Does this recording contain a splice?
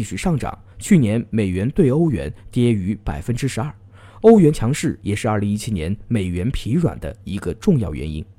no; 0 cuts

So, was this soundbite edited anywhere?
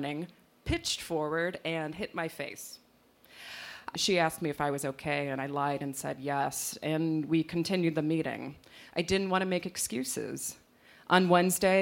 yes; 1 cut; at 3.9 s

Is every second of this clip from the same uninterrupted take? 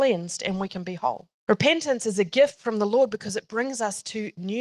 no; 1 cut; at 1.4 s

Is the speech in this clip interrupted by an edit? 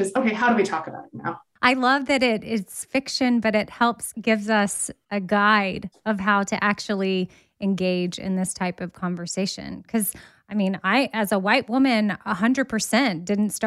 no; 0 cuts

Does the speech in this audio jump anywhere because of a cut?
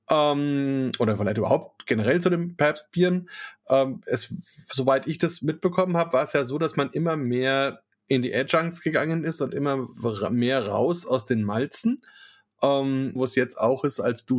yes; 1 cut; at 13.2 s

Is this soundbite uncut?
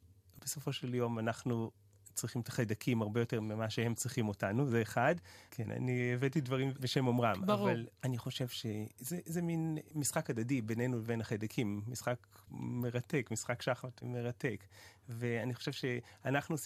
no; 1 cut; at 5.5 s

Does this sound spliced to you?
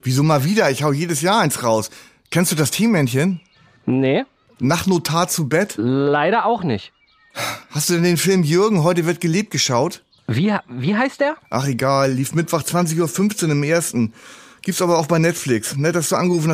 no; 0 cuts

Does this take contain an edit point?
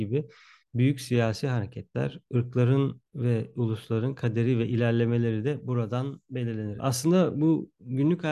yes; 2 cuts; at 3.1 s, 6.8 s

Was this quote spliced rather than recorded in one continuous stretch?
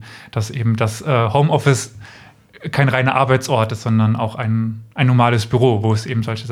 yes; 1 cut; at 4.9 s

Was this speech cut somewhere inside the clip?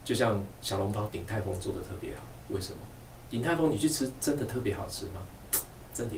yes; 1 cut; at 1.1 s

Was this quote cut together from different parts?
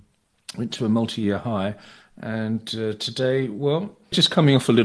no; 0 cuts

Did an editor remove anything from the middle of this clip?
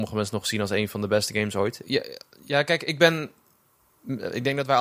yes; 1 cut; at 1.8 s

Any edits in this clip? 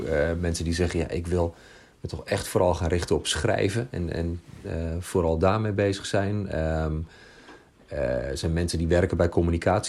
no; 0 cuts

